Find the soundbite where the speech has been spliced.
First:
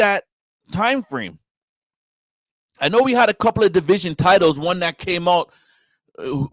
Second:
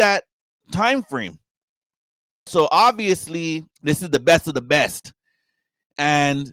second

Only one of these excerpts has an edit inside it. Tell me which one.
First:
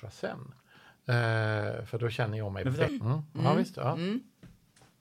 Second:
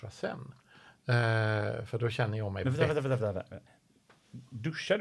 first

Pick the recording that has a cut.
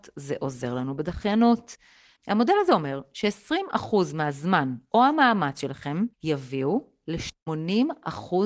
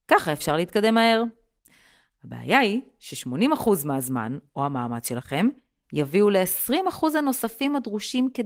first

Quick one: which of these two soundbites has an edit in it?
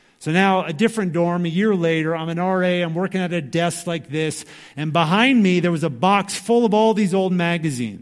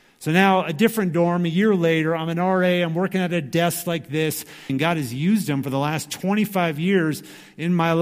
second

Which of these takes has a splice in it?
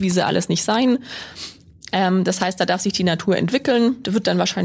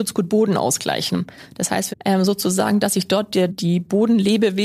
second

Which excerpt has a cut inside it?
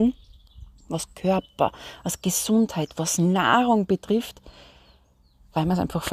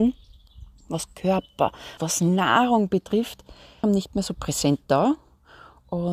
second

